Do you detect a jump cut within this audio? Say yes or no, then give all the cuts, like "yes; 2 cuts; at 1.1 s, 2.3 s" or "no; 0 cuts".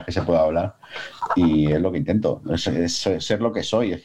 no; 0 cuts